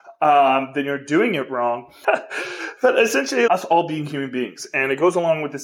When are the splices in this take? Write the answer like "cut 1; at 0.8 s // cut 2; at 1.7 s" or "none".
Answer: cut 1; at 2.0 s // cut 2; at 3.5 s